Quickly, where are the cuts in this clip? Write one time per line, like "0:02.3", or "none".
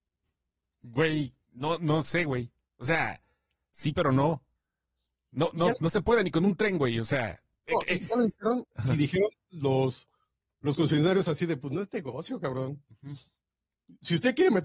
0:08.6